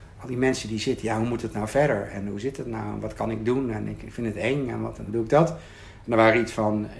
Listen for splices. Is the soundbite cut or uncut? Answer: cut